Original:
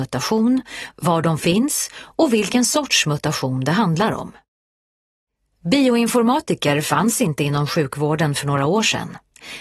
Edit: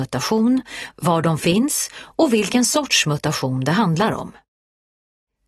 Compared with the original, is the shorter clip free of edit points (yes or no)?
yes